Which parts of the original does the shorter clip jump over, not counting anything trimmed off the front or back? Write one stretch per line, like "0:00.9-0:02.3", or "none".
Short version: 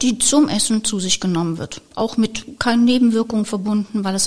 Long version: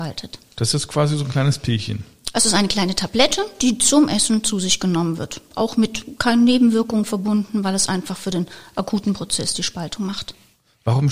none